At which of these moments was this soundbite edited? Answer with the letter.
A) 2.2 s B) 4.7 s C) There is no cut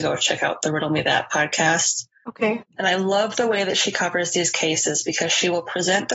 A